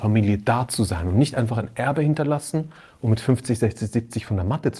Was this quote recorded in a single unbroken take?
yes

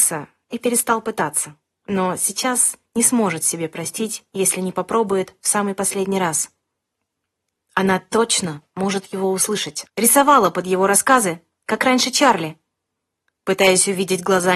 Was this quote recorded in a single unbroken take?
no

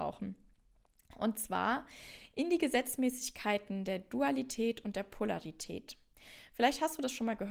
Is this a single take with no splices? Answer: yes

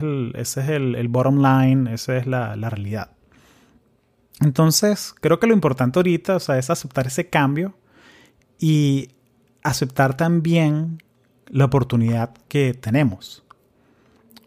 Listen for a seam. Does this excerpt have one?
no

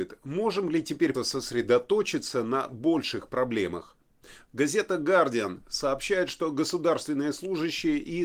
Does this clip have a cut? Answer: yes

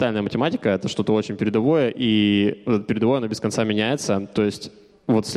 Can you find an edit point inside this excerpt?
no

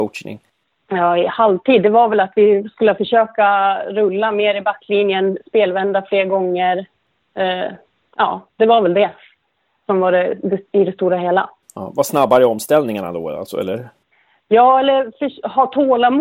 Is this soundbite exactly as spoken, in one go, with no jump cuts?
yes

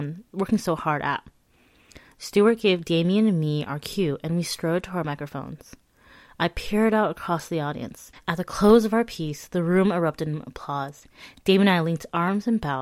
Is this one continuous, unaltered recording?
no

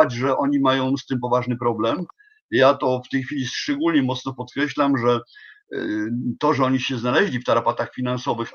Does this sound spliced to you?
no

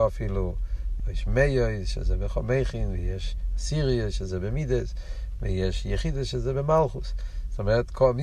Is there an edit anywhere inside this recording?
yes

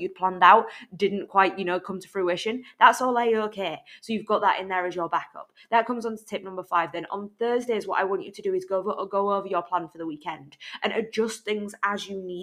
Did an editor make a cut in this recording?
no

